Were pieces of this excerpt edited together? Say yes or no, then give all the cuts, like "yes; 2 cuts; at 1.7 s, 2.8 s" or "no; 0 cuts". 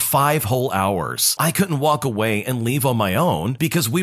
yes; 1 cut; at 1.4 s